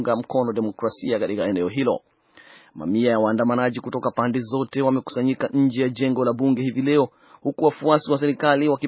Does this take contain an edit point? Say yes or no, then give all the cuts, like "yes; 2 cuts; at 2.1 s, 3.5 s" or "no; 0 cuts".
no; 0 cuts